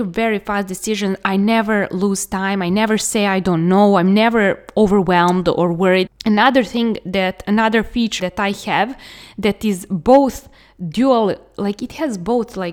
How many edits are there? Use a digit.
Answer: 2